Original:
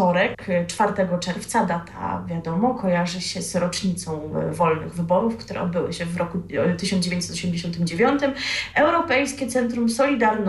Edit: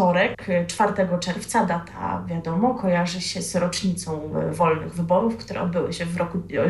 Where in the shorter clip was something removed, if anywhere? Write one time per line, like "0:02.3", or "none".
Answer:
none